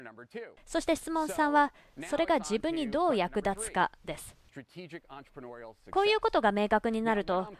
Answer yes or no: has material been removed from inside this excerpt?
yes